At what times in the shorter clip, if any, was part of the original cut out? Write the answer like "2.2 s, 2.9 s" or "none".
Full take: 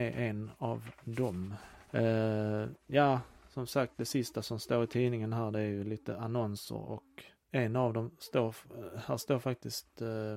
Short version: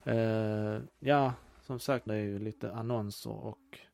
2.1 s